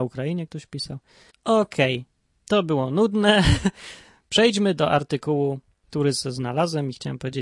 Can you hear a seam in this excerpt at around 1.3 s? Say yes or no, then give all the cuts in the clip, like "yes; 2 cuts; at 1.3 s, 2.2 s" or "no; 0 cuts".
yes; 1 cut; at 1.3 s